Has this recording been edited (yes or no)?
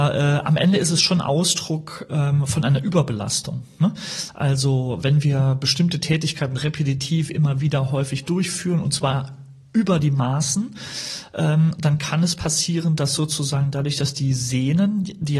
no